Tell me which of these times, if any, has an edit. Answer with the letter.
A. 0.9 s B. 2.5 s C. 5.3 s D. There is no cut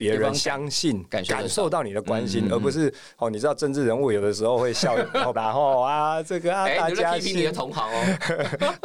C